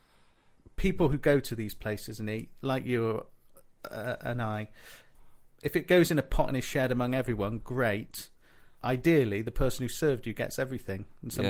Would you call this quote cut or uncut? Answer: cut